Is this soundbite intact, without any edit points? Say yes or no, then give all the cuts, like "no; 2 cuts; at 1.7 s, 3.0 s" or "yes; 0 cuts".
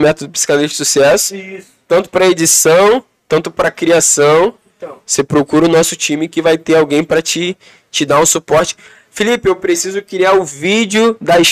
yes; 0 cuts